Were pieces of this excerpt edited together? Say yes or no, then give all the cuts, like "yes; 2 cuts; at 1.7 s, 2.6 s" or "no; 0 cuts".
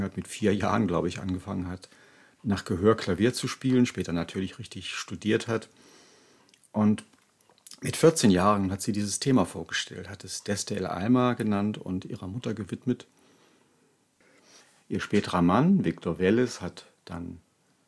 no; 0 cuts